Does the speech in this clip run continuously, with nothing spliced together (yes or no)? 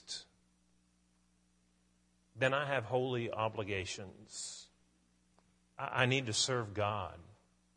yes